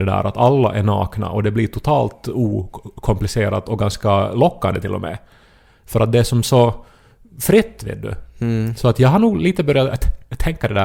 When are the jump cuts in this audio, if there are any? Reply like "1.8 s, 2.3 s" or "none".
none